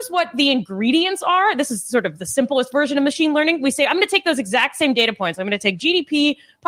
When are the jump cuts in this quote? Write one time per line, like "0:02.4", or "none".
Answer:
none